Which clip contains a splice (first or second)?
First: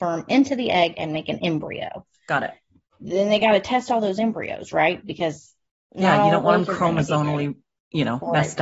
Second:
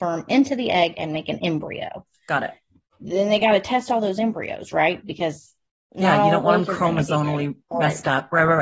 second